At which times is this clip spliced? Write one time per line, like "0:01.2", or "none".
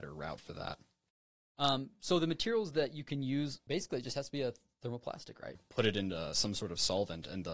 0:03.7
0:05.6